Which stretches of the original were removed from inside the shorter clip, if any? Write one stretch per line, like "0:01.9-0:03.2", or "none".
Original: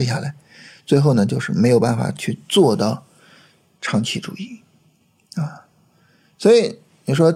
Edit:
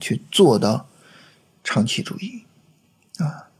none